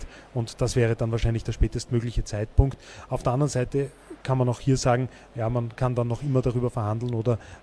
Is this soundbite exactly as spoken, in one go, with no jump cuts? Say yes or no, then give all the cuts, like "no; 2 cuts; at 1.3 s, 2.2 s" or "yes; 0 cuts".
yes; 0 cuts